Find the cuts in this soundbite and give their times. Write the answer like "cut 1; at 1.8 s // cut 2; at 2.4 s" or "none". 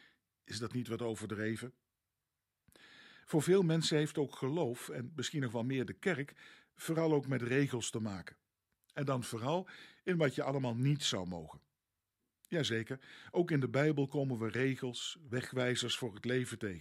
none